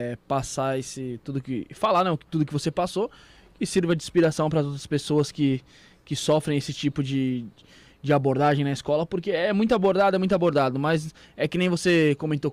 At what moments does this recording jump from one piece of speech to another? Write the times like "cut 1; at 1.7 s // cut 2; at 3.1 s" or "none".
none